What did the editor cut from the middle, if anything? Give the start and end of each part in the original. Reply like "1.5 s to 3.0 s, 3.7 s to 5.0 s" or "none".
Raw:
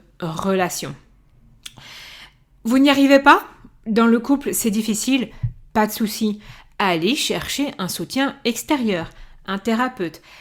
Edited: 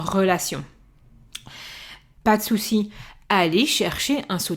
2.5 s to 5.7 s